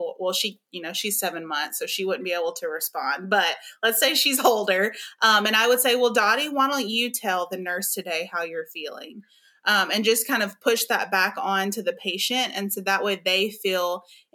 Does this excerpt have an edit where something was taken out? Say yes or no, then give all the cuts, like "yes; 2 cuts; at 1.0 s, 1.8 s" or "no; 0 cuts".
no; 0 cuts